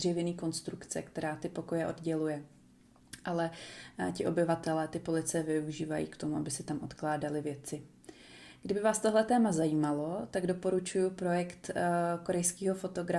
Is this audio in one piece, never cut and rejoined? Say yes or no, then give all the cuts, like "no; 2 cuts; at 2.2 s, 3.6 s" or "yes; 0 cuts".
yes; 0 cuts